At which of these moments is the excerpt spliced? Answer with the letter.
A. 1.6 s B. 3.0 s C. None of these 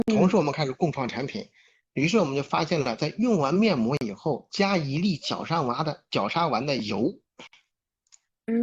C